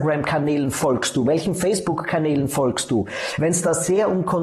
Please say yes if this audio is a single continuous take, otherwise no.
yes